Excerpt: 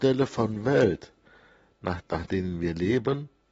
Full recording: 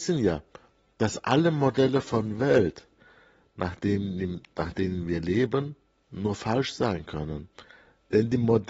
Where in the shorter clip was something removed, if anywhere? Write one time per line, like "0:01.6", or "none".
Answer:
0:02.0